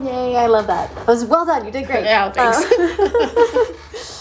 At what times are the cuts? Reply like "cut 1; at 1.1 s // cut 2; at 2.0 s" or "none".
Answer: none